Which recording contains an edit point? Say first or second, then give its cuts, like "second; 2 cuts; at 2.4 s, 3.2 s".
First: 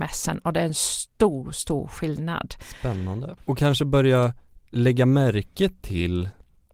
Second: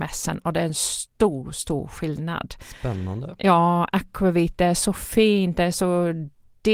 first; 1 cut; at 3.4 s